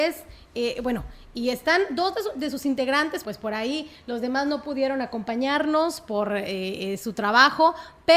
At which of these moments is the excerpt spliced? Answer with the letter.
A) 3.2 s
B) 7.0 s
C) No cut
A